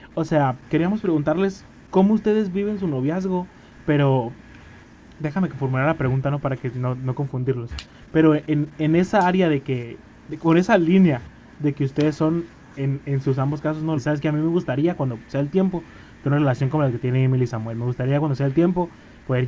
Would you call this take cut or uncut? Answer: cut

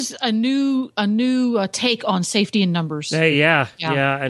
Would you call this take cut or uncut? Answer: uncut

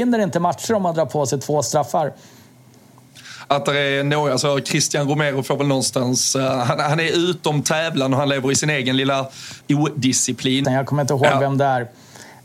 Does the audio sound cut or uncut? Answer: cut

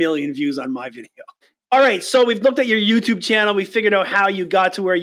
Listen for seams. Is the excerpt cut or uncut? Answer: uncut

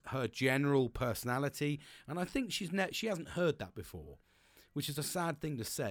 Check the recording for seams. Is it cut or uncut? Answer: uncut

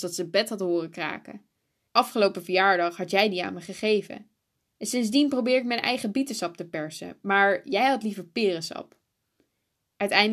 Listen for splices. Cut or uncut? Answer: cut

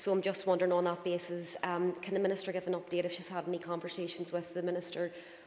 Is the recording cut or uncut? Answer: uncut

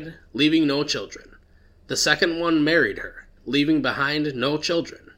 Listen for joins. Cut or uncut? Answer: cut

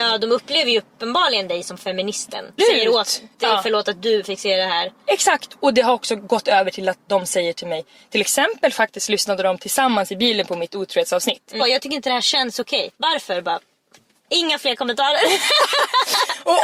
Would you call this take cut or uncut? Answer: cut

